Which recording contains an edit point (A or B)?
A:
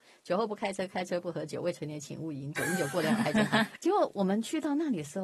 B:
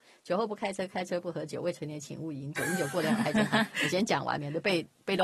A